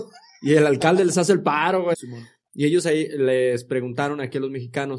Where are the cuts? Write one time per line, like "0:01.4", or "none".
0:01.9

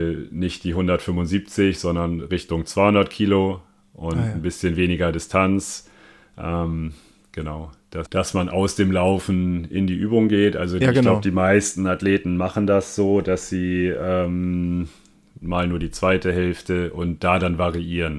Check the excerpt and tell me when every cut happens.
0:08.0
0:15.4

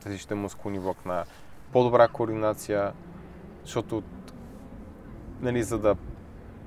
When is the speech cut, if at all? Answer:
0:01.7

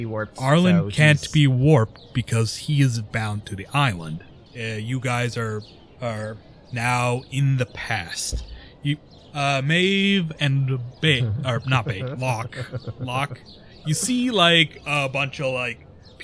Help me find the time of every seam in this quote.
0:04.5

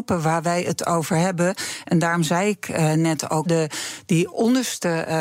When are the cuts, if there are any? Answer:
0:03.5

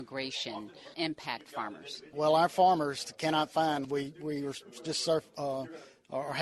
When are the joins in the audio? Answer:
0:03.8

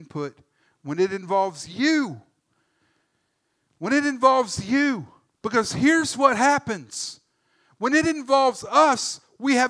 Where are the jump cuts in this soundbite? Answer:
none

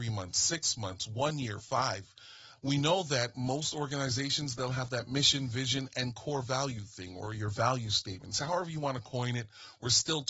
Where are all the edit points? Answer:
0:02.6

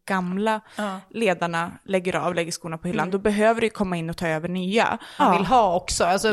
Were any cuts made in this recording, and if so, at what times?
0:05.2

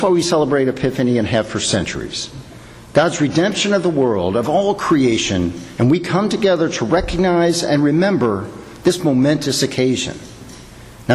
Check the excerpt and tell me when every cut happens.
0:05.8

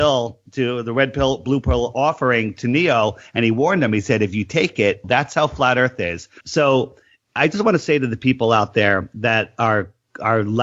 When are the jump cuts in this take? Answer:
0:05.0
0:06.4

